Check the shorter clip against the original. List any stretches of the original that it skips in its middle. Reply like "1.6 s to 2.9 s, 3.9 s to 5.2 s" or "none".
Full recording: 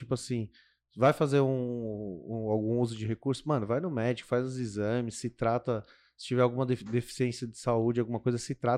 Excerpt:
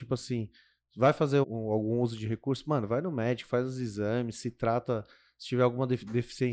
1.4 s to 2.2 s